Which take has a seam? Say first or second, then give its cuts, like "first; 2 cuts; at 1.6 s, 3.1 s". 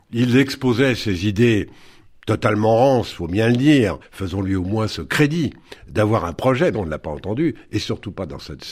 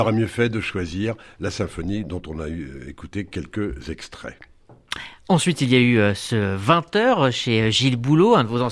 first; 2 cuts; at 4.0 s, 6.7 s